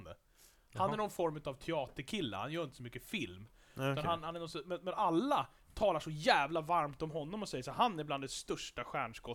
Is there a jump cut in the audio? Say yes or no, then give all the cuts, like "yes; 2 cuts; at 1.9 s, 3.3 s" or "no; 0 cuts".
no; 0 cuts